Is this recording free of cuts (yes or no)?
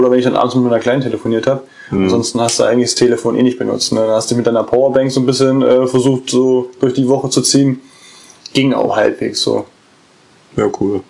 yes